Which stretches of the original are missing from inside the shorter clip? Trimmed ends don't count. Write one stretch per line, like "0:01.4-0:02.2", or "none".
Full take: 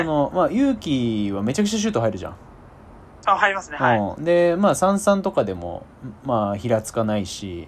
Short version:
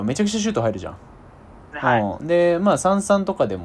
0:03.1-0:03.7